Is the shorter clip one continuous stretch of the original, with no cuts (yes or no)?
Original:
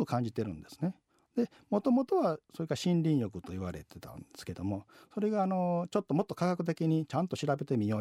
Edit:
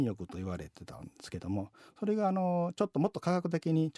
yes